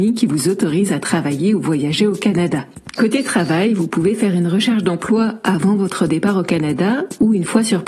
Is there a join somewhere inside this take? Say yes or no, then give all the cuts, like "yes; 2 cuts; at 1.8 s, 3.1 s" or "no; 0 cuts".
no; 0 cuts